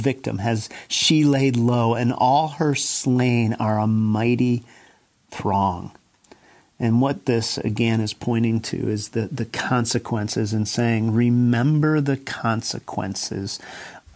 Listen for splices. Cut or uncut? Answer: uncut